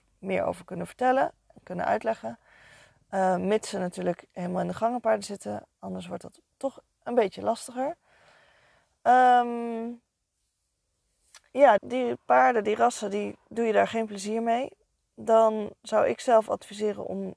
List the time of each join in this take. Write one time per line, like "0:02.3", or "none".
0:11.8